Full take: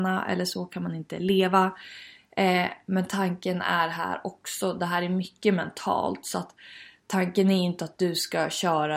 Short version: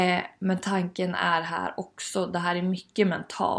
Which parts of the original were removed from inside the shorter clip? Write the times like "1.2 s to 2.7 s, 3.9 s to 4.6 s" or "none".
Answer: none